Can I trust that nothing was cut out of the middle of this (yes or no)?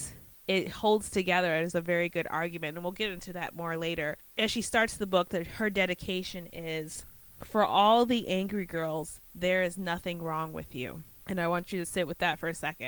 yes